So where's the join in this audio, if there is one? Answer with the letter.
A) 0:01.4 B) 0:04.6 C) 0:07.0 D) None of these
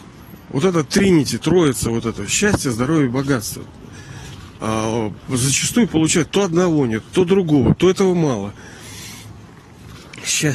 A